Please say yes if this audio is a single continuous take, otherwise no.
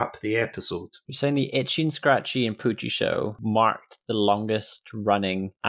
yes